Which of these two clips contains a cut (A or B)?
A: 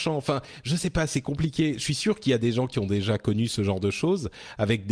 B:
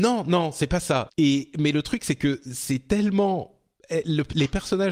B